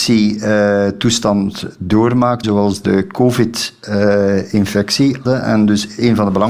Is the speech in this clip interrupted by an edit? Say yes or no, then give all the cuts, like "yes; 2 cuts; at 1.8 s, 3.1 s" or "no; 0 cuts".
yes; 2 cuts; at 2.4 s, 5.2 s